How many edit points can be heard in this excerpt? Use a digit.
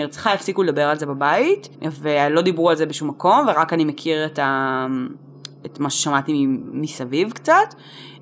1